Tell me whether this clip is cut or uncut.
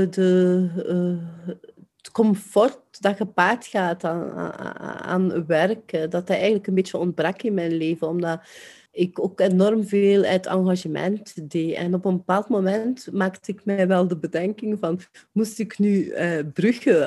uncut